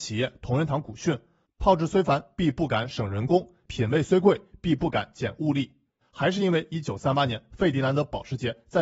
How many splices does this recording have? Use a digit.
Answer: 1